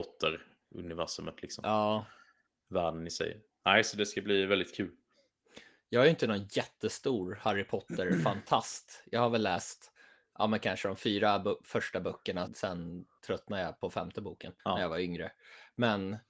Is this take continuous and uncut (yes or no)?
no